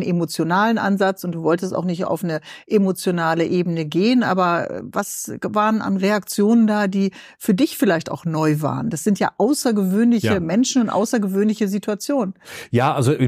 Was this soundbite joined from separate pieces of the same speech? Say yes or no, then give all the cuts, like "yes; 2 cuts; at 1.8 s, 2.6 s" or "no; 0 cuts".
no; 0 cuts